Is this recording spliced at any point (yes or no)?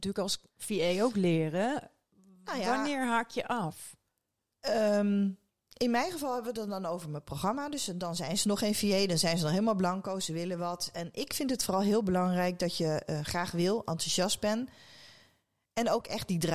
no